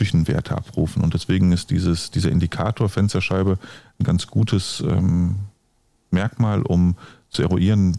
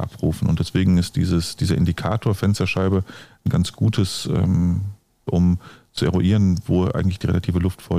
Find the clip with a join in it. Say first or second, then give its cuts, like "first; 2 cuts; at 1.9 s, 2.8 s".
second; 1 cut; at 5.3 s